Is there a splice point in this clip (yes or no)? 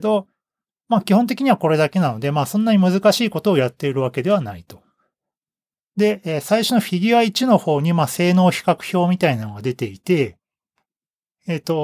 no